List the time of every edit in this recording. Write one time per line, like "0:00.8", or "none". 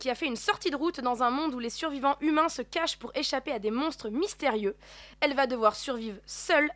0:05.1